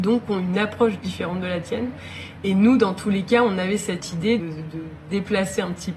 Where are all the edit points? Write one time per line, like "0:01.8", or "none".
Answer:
0:04.4